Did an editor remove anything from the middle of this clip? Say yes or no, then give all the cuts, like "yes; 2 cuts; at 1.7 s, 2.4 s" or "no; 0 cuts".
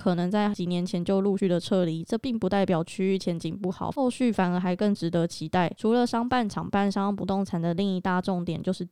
no; 0 cuts